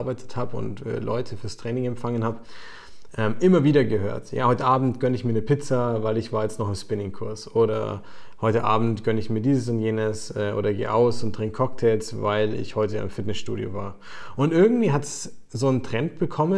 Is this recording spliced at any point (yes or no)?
no